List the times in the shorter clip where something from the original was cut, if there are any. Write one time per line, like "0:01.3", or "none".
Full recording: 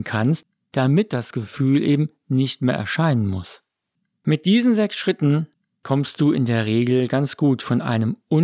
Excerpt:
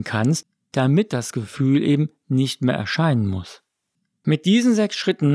none